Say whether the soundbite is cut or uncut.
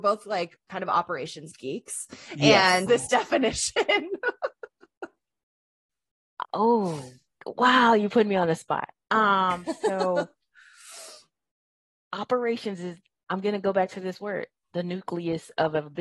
cut